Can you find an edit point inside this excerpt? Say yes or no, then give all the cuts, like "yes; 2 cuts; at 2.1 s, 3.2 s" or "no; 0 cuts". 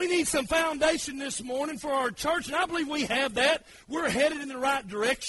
no; 0 cuts